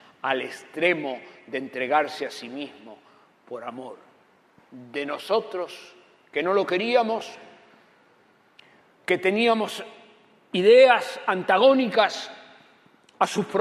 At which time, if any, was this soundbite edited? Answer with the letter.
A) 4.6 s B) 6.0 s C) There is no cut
C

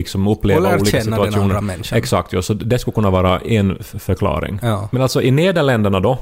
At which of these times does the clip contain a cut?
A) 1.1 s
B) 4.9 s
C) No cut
C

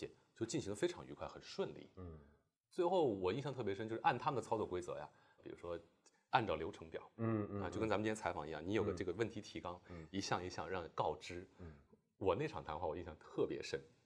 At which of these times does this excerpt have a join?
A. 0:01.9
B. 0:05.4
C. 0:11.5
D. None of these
B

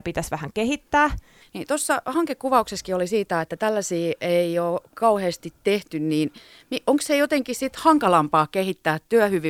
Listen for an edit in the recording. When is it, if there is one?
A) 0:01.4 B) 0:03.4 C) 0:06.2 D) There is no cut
A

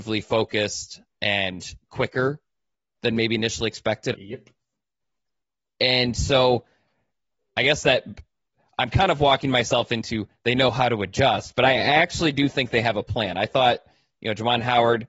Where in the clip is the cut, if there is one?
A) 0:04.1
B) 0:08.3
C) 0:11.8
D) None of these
A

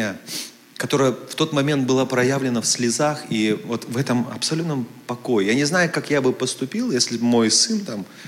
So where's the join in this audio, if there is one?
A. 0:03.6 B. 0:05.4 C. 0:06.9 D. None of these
D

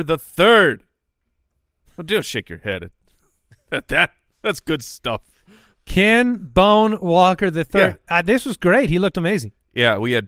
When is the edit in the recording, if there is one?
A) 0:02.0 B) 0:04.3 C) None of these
C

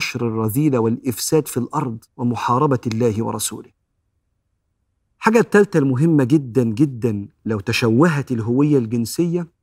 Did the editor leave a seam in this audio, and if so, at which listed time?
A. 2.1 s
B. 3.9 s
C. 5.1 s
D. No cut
A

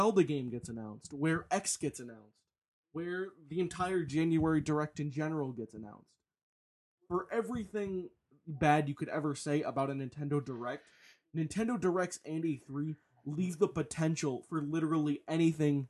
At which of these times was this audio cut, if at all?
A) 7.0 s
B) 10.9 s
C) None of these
C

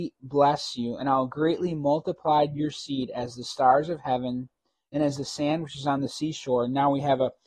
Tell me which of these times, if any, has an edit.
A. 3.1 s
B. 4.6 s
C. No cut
C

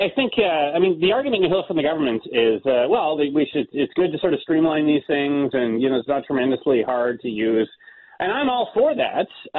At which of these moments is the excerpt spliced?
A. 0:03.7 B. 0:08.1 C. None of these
C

